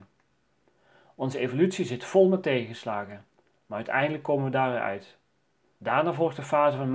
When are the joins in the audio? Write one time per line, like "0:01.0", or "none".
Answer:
0:05.7